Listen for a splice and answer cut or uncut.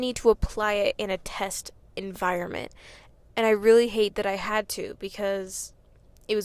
uncut